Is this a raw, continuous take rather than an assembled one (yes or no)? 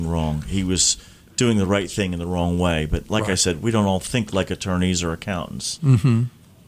yes